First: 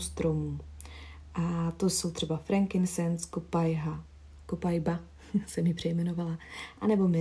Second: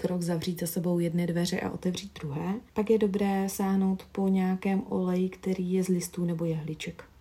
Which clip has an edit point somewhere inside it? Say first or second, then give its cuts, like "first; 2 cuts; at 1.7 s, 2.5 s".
second; 1 cut; at 2.7 s